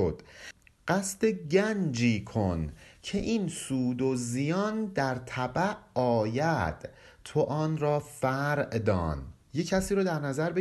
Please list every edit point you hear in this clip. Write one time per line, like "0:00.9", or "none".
0:09.4